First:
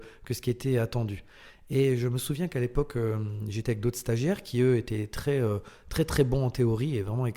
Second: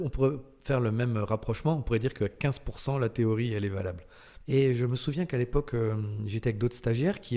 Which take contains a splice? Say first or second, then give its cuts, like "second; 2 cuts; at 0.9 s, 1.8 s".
second; 1 cut; at 4.4 s